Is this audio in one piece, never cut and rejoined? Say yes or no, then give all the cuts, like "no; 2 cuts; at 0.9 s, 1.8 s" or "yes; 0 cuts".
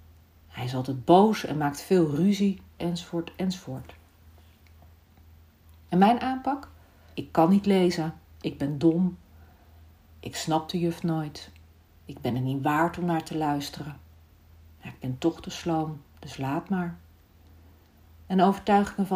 no; 2 cuts; at 2.8 s, 7.1 s